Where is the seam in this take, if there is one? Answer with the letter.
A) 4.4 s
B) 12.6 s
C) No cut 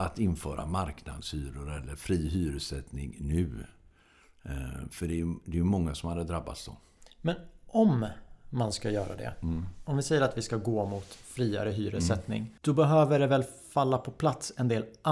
B